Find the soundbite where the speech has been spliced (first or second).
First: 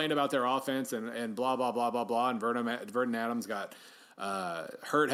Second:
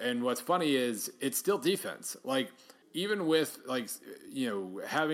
second